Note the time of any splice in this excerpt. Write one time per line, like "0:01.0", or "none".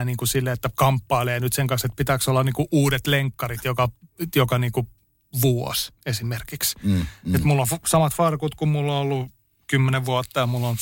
none